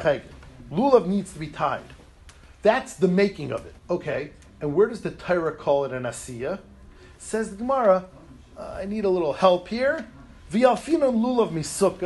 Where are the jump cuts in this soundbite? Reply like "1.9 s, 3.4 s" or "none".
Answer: 3.8 s